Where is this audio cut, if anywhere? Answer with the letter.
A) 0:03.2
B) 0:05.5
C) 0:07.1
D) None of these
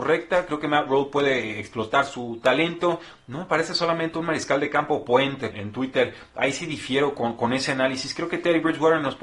B